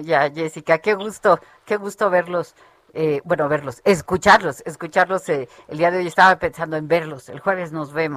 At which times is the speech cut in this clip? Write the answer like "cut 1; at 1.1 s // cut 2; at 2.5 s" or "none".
none